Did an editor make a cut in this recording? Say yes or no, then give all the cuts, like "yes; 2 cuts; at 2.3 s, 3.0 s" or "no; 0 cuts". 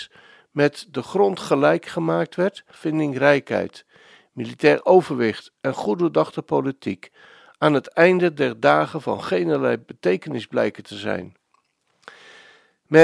yes; 1 cut; at 2.7 s